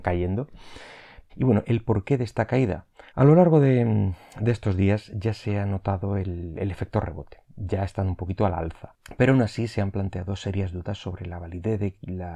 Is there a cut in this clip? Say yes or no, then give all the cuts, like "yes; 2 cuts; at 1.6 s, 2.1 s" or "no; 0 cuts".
yes; 2 cuts; at 1.3 s, 3.1 s